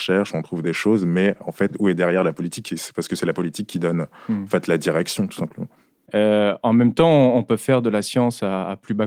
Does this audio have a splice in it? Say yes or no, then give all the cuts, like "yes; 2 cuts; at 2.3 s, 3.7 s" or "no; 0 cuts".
yes; 1 cut; at 6.1 s